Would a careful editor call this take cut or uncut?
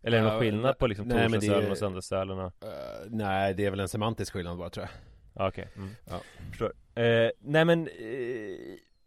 uncut